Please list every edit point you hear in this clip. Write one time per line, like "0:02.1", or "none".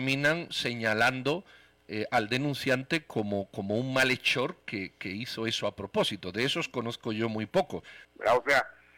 0:08.0